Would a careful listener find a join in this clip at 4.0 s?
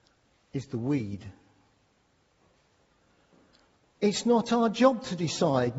yes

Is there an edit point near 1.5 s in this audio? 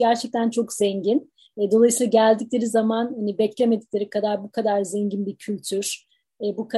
yes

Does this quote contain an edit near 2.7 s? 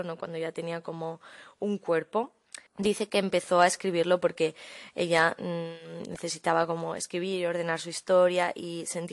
yes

